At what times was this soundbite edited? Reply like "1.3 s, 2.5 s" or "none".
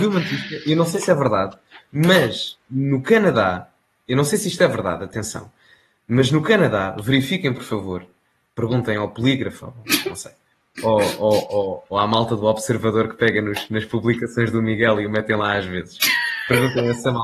9.6 s, 11.9 s